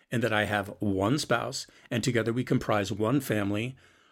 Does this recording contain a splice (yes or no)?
no